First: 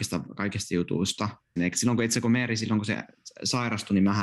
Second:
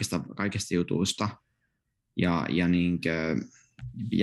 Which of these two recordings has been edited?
first; 1 cut; at 1.6 s

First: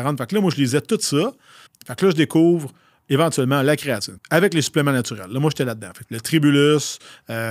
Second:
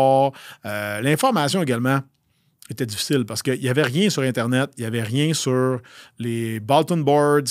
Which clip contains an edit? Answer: first; 3 cuts; at 1.7 s, 4.2 s, 6.0 s

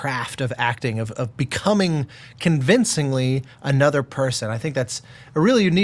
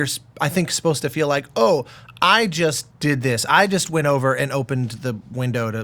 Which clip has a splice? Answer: second; 1 cut; at 2.9 s

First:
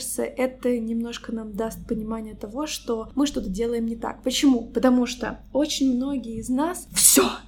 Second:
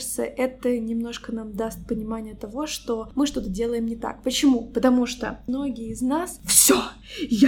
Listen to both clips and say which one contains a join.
second; 1 cut; at 5.5 s

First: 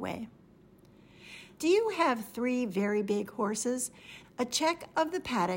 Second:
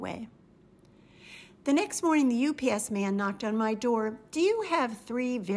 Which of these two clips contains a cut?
first; 2 cuts; at 1.6 s, 4.2 s

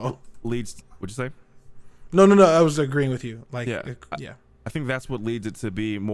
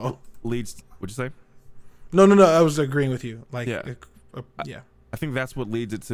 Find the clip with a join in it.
first; 1 cut; at 4.1 s

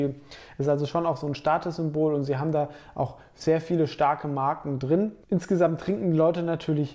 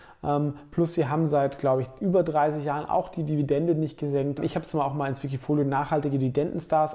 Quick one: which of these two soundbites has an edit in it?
first; 1 cut; at 5.2 s

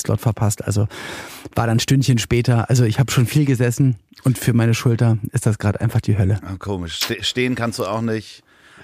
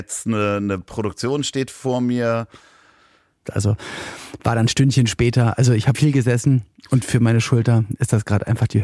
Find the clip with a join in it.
second; 2 cuts; at 3.4 s, 5.9 s

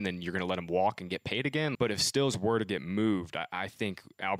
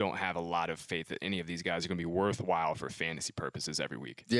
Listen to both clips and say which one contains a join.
first; 1 cut; at 1.8 s

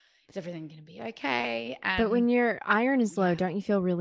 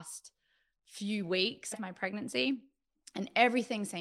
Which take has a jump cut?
second; 1 cut; at 1.7 s

